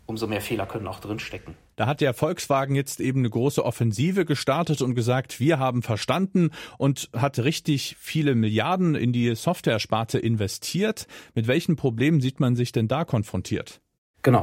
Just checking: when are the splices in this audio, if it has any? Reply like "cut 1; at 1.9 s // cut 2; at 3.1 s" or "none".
cut 1; at 1.7 s